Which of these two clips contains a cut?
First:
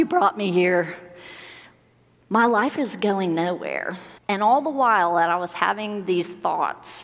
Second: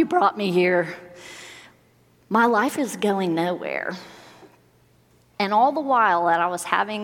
first; 1 cut; at 4.2 s

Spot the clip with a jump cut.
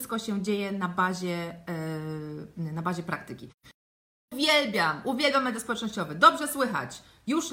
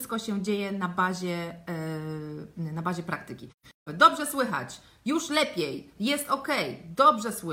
second; 2 cuts; at 3.9 s, 6.0 s

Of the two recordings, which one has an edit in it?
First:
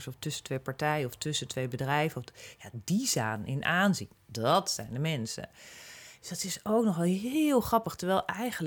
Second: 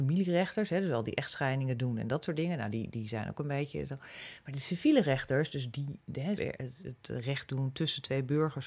second; 1 cut; at 6.4 s

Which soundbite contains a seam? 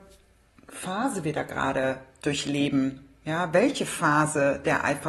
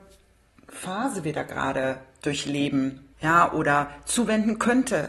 second; 1 cut; at 3.1 s

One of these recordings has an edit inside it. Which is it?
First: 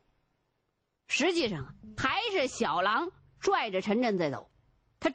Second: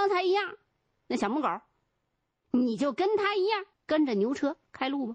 second; 2 cuts; at 1.0 s, 3.7 s

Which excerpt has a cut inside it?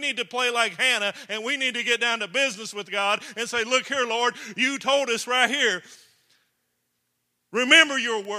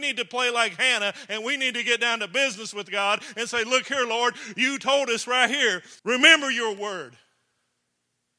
second; 1 cut; at 6.0 s

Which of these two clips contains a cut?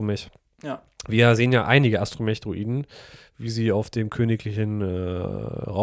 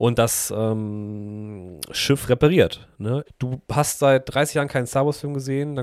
second; 1 cut; at 3.3 s

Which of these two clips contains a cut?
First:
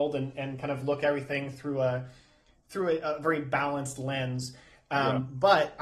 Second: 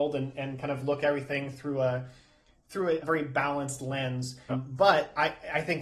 second; 2 cuts; at 3.0 s, 4.5 s

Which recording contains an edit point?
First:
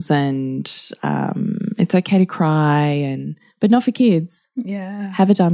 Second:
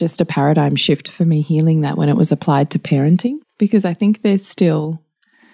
second; 1 cut; at 3.4 s

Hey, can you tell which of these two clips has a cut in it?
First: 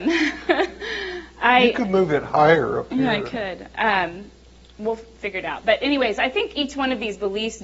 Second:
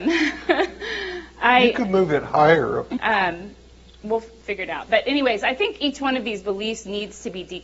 second; 1 cut; at 3.0 s

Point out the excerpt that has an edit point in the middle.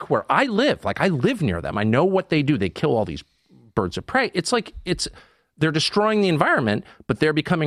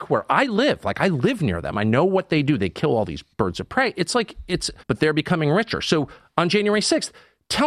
second; 2 cuts; at 3.3 s, 4.8 s

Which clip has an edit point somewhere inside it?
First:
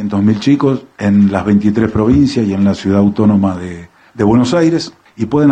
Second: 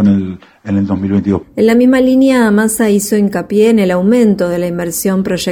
second; 1 cut; at 1.4 s

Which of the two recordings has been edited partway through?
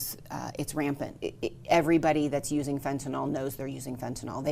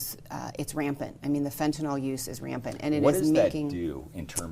first; 1 cut; at 1.2 s

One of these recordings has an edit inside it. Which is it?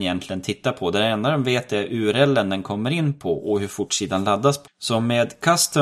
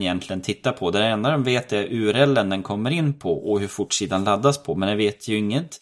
first; 1 cut; at 4.7 s

